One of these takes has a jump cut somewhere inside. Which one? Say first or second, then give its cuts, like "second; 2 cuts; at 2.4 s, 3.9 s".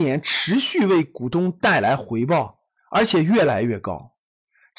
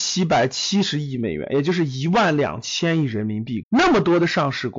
second; 1 cut; at 3.6 s